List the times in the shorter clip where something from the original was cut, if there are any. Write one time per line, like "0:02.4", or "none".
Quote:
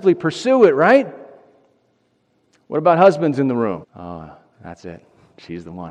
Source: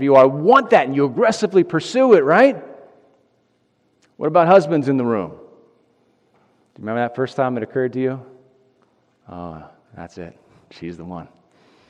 0:03.8